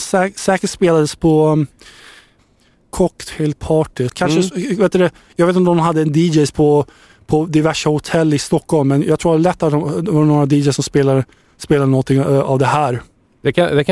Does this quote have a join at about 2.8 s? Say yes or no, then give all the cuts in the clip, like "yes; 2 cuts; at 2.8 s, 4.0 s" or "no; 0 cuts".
no; 1 cut; at 4.1 s